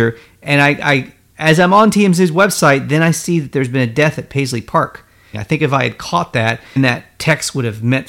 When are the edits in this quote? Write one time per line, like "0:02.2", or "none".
0:05.3
0:06.8